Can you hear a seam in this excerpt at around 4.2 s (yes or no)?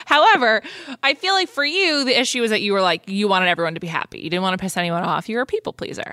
no